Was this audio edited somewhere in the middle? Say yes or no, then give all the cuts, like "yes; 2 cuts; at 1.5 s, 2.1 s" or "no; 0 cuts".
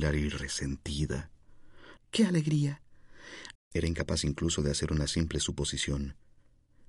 yes; 2 cuts; at 2.0 s, 3.6 s